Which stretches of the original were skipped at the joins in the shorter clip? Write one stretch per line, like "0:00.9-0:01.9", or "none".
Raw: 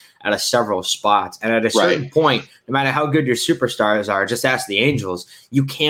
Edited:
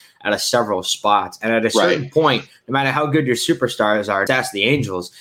0:04.3-0:04.4